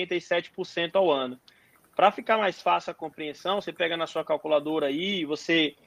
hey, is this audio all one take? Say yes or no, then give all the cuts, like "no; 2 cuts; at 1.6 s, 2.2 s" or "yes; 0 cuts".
yes; 0 cuts